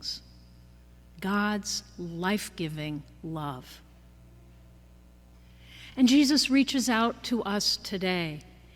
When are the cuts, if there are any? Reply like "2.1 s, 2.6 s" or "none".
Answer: none